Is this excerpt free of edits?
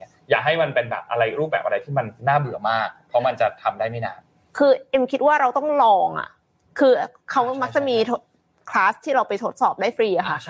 no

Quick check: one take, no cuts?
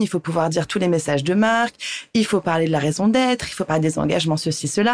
yes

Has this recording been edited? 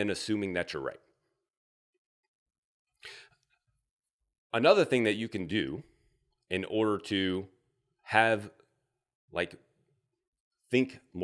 no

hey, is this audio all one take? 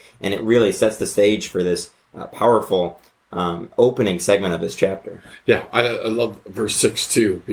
yes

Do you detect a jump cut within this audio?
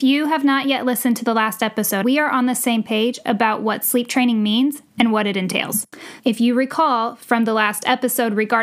yes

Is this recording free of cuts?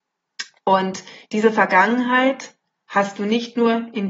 yes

